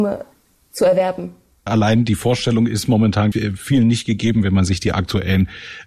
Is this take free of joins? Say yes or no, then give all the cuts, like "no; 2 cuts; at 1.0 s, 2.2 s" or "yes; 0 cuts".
no; 2 cuts; at 1.7 s, 3.3 s